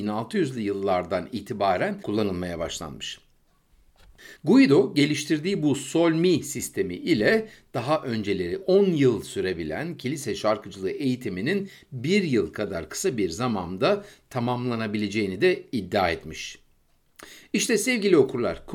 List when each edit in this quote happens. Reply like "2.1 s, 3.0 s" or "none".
4.4 s

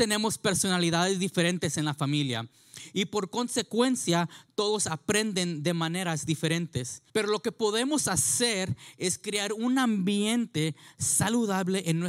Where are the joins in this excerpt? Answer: 7.1 s

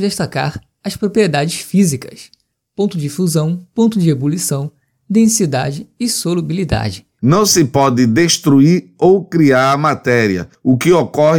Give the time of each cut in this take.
7.2 s

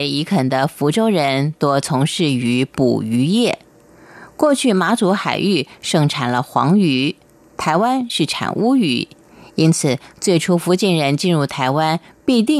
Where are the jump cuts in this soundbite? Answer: none

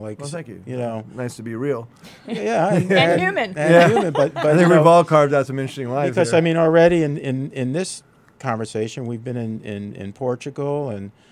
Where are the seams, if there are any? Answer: none

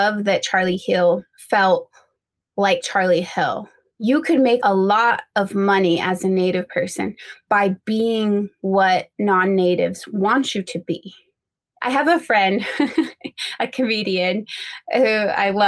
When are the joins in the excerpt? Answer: 1.3 s

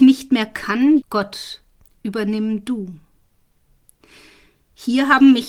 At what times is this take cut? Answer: 1.0 s

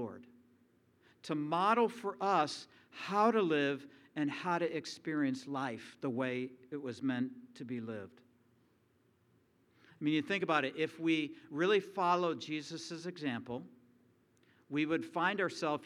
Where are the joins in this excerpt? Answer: none

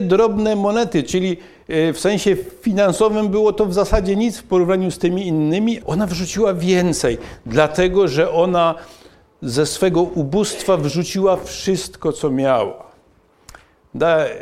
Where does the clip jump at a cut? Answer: 5.8 s

